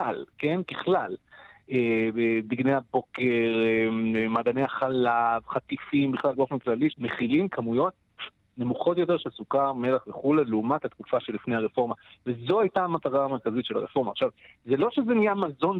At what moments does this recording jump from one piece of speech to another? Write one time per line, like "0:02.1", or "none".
0:06.9